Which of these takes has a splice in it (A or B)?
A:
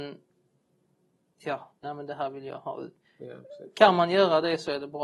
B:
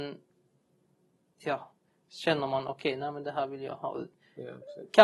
A